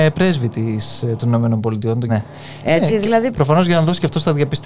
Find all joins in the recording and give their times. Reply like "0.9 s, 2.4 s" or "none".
2.1 s, 3.3 s

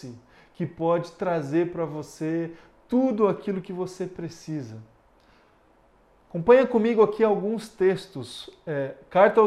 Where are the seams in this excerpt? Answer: none

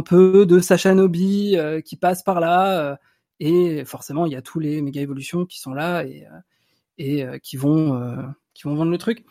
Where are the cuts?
none

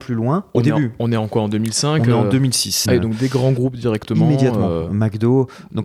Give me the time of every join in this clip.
2.9 s

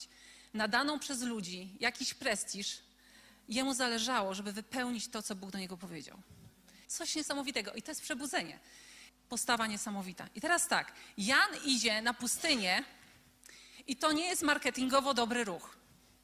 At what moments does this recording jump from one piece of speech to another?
6.8 s, 9.1 s

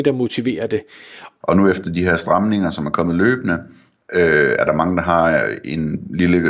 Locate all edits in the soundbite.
1.4 s

